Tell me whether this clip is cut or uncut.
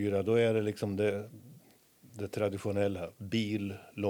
uncut